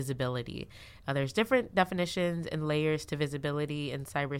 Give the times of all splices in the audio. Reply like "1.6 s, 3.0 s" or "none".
1.0 s